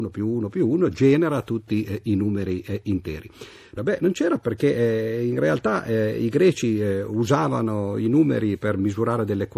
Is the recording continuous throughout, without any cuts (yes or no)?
no